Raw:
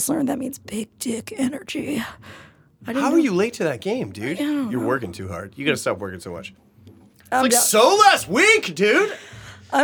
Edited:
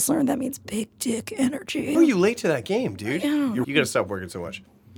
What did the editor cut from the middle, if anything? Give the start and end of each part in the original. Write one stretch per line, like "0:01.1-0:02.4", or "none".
0:01.9-0:03.1
0:04.8-0:05.5